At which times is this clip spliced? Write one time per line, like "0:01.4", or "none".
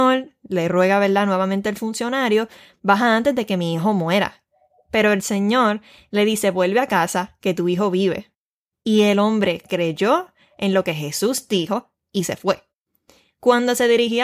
none